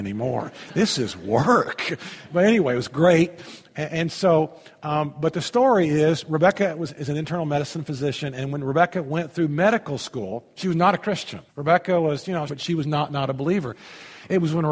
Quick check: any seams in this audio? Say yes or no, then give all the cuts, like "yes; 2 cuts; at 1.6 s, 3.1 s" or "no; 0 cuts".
yes; 2 cuts; at 11.5 s, 12.5 s